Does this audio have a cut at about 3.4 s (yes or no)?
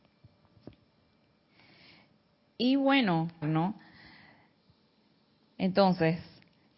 yes